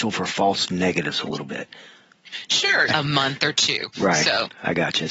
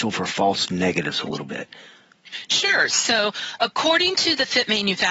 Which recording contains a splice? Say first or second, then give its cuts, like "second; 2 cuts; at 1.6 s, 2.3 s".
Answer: first; 1 cut; at 2.9 s